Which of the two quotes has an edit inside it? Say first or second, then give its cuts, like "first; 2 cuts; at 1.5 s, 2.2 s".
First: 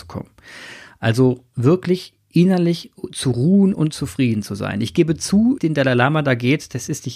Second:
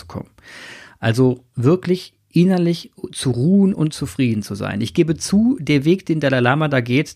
first; 1 cut; at 5.6 s